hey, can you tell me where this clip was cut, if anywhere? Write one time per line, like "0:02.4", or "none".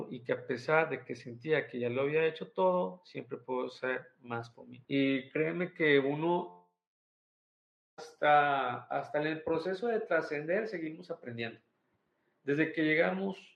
0:04.9